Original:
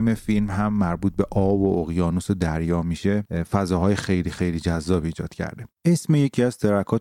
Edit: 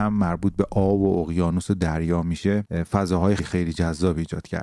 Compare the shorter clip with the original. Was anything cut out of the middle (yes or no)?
yes